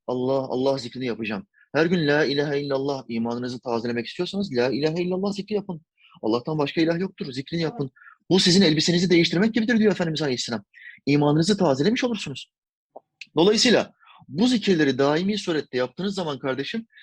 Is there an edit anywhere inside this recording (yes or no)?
no